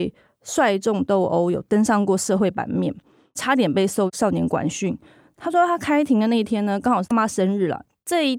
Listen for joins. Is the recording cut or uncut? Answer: cut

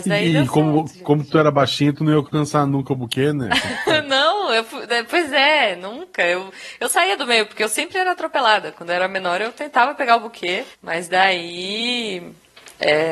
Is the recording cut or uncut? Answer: cut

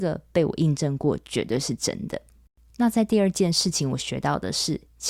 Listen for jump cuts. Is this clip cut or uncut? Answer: uncut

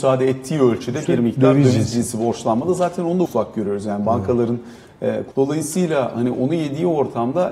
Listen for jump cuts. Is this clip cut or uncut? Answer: cut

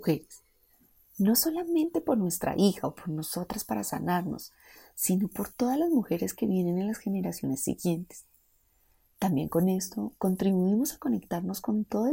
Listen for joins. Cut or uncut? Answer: uncut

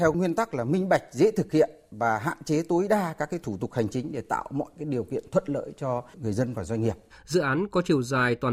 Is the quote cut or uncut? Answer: cut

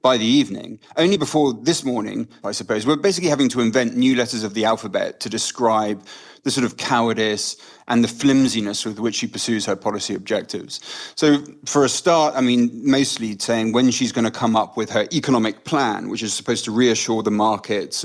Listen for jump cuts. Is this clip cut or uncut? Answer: cut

